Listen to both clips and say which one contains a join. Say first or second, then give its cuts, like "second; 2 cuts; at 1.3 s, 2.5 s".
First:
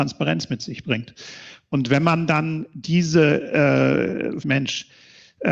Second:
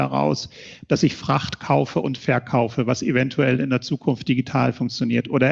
first; 1 cut; at 4.4 s